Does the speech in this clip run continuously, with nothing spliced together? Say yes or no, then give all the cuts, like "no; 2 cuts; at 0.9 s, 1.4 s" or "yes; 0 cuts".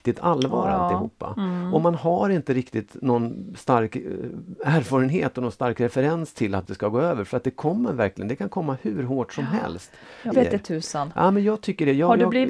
no; 2 cuts; at 6.6 s, 10.3 s